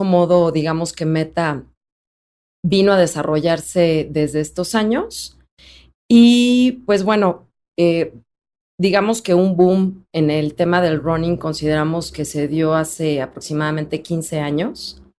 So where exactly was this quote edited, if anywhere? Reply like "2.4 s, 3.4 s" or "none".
none